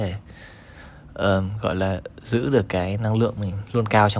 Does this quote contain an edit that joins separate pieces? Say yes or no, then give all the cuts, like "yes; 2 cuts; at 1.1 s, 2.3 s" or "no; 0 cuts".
no; 0 cuts